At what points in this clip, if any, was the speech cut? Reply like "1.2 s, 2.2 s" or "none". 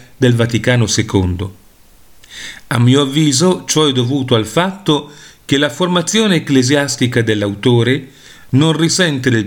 none